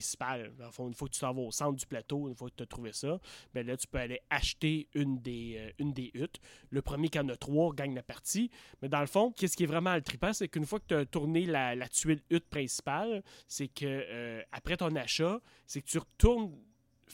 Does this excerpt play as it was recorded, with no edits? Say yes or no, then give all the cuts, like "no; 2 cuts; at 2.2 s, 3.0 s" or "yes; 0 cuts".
yes; 0 cuts